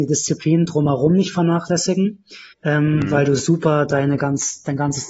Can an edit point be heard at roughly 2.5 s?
yes; 1 cut; at 2.5 s

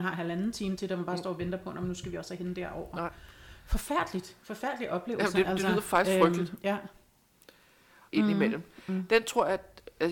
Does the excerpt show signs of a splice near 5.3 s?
no; 1 cut; at 8.1 s

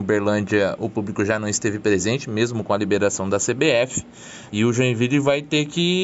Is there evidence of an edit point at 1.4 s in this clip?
no; 1 cut; at 4.5 s

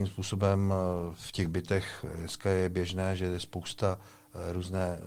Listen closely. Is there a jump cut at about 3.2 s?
no; 0 cuts

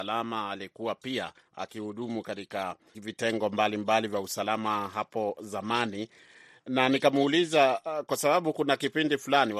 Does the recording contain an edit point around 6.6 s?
no; 1 cut; at 2.9 s

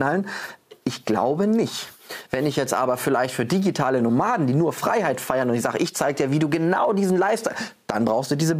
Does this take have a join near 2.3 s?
no; 0 cuts

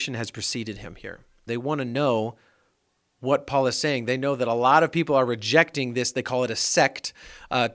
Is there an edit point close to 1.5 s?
yes; 1 cut; at 1.5 s

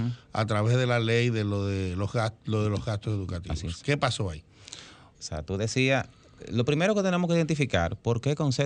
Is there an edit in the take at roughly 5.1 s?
yes; 1 cut; at 5.1 s

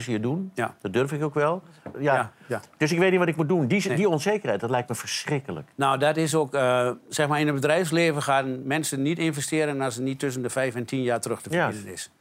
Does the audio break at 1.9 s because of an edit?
yes; 1 cut; at 1.9 s

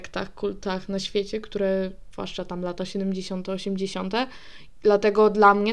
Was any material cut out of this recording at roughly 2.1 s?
yes; 1 cut; at 2.1 s

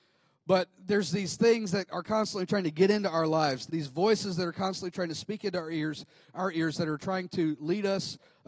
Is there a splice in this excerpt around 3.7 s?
yes; 1 cut; at 3.7 s

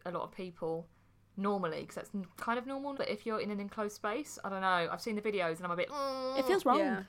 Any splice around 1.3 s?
no; 2 cuts; at 2.9 s, 5.9 s

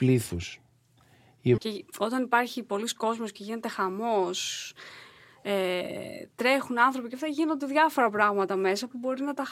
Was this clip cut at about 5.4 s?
no; 1 cut; at 1.6 s

